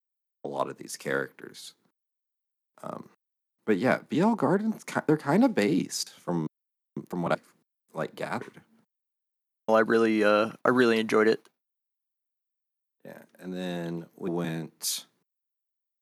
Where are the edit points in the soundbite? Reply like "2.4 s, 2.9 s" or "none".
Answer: 9.7 s, 14.3 s